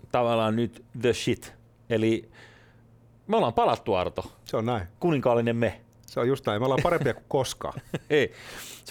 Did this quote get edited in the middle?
yes; 1 cut; at 5.0 s

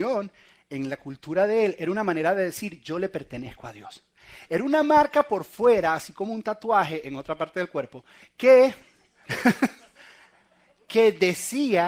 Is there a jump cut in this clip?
no; 0 cuts

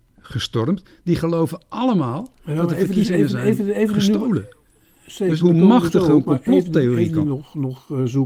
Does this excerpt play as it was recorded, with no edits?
no; 2 cuts; at 5.4 s, 7.2 s

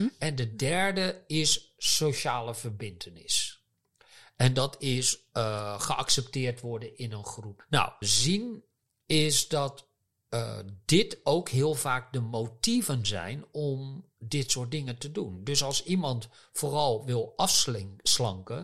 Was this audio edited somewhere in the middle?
yes; 1 cut; at 8.0 s

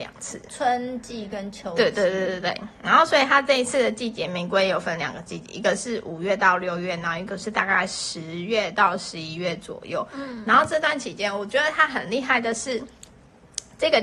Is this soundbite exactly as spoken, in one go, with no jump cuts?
yes; 0 cuts

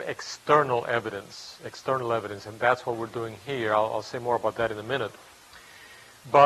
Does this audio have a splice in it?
no; 0 cuts

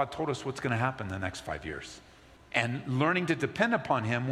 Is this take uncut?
no; 1 cut; at 2.4 s

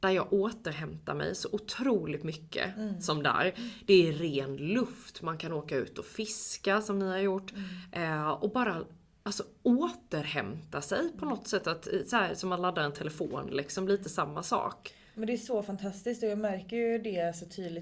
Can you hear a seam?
no; 0 cuts

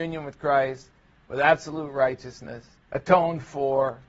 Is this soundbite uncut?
no; 1 cut; at 2.7 s

